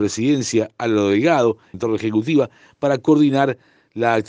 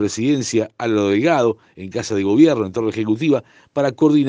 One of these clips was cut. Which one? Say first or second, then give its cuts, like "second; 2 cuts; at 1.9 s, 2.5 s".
first; 1 cut; at 1.7 s